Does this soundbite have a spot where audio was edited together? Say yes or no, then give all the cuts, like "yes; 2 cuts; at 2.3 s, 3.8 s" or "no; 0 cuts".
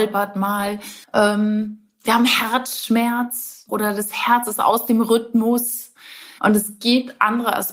yes; 3 cuts; at 1.0 s, 3.7 s, 6.4 s